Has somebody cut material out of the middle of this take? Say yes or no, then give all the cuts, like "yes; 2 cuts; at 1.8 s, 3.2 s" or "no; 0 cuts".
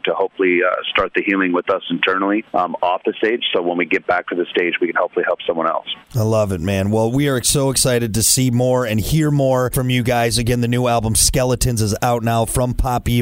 no; 0 cuts